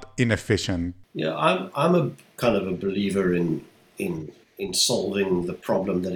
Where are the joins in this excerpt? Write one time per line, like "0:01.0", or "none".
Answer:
none